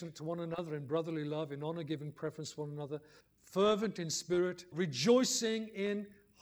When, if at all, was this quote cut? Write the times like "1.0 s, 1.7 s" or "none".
3.2 s, 4.7 s